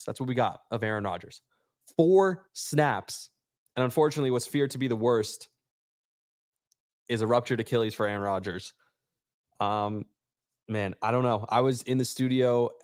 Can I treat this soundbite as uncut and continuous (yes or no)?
yes